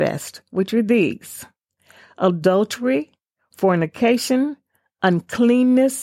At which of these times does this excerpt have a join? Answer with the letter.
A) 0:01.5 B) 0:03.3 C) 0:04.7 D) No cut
D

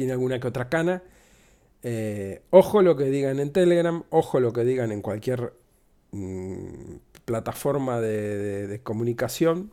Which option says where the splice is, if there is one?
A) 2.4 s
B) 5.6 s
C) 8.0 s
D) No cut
D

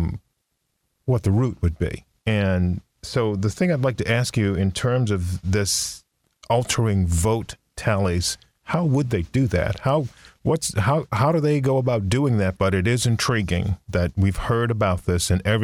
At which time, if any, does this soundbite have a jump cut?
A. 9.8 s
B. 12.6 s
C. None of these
B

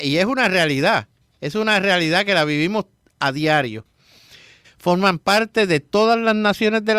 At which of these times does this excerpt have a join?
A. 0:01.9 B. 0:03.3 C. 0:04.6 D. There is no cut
C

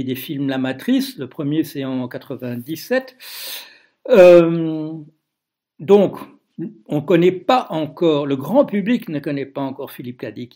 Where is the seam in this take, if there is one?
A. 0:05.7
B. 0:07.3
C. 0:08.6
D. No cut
D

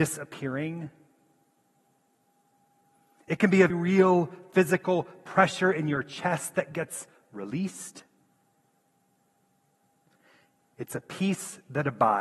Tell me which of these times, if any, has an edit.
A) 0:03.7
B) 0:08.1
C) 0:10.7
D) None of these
A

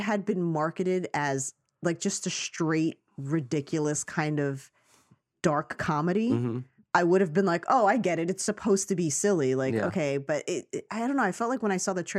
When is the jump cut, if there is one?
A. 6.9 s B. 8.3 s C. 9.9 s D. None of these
D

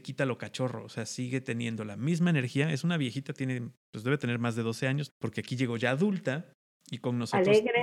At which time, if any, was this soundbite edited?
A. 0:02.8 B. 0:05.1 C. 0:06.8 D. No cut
B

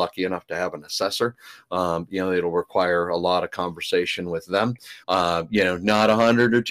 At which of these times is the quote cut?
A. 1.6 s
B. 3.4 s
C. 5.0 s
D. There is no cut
C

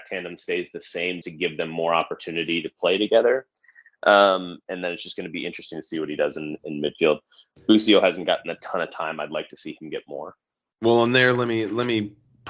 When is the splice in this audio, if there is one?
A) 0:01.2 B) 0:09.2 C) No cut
A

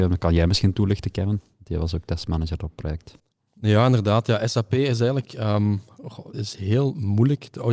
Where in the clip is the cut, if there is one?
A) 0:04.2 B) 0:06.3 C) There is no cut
B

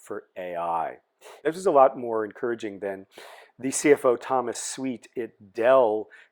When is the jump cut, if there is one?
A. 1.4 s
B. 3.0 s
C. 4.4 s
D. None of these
A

